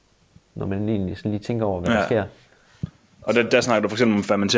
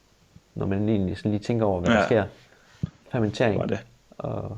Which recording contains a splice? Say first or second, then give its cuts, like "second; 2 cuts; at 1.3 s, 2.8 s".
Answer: second; 1 cut; at 3.0 s